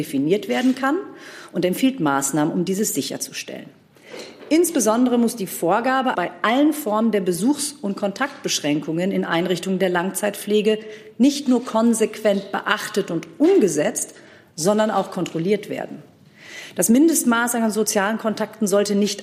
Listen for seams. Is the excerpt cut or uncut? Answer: cut